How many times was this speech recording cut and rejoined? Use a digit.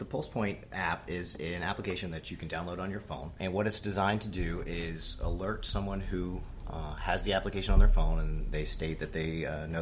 0